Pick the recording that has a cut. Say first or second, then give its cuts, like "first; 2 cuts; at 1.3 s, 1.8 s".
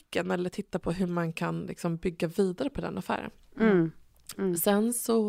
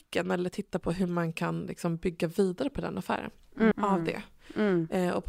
second; 1 cut; at 3.7 s